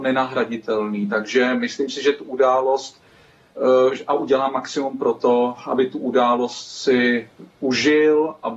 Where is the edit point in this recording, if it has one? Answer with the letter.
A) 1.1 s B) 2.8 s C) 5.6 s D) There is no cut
D